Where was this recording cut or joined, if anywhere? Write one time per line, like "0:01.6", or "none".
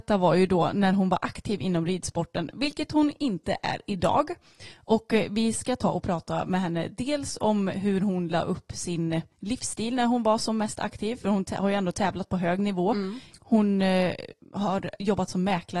0:09.3
0:13.3